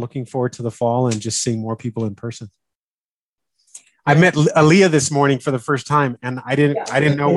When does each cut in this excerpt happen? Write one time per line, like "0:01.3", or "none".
none